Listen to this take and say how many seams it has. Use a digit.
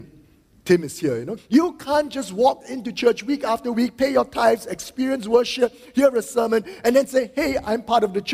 1